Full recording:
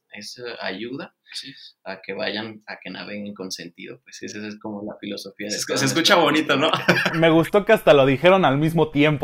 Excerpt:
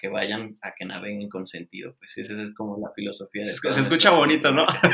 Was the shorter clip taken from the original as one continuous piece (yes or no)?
yes